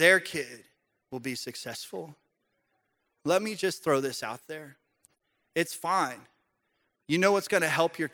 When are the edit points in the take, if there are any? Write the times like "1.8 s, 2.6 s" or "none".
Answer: none